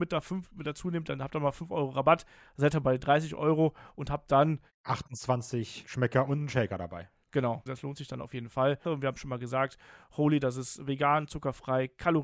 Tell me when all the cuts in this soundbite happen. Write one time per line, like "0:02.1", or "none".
0:07.7
0:08.8